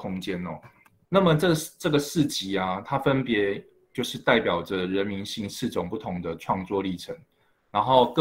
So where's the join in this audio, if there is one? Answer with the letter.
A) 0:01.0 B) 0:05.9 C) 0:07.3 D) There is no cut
A